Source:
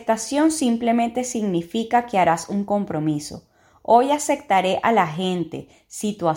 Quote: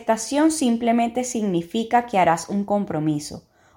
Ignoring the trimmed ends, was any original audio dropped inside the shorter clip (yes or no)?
no